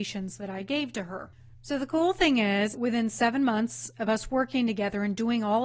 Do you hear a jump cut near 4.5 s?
no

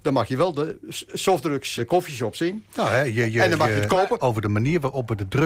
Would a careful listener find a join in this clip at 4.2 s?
yes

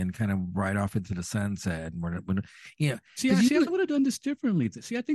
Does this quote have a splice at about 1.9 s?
no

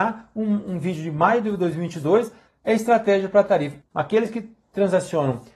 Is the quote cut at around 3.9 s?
yes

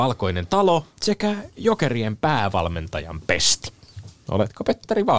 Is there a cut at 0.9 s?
yes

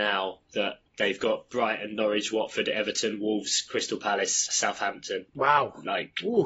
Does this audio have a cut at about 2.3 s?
no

